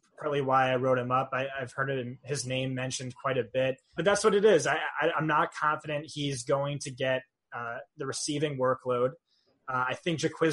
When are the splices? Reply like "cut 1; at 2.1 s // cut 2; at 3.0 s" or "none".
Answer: cut 1; at 4.0 s